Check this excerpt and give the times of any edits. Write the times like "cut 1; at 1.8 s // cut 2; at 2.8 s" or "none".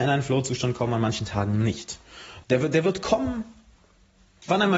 cut 1; at 2.4 s